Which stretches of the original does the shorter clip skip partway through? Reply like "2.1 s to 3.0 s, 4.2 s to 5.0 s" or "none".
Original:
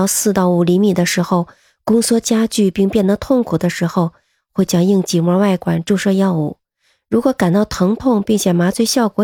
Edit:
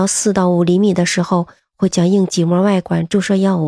1.6 s to 4.3 s